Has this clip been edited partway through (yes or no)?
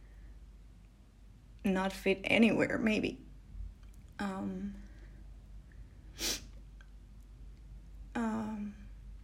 yes